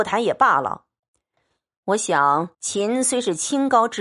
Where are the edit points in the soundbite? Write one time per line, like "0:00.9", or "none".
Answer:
0:02.5

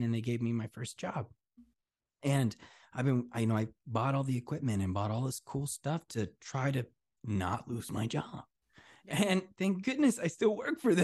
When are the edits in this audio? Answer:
none

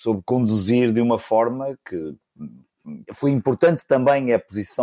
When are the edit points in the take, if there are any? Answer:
0:03.1

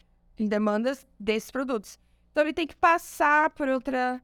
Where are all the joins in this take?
none

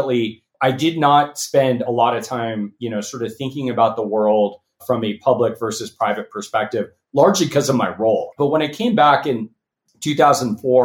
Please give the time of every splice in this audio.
0:08.3

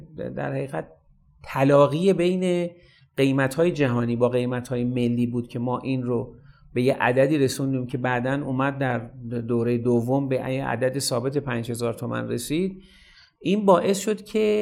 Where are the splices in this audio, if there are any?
none

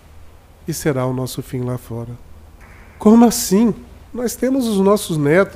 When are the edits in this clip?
0:04.1

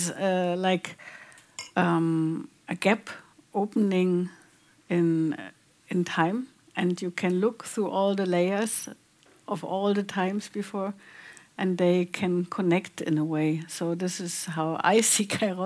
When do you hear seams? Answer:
none

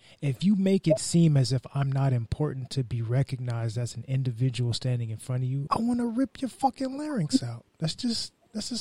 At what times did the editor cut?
0:05.7

